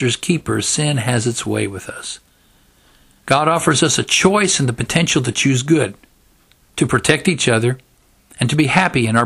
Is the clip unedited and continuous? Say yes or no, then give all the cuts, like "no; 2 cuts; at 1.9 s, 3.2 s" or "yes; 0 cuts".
no; 1 cut; at 3.2 s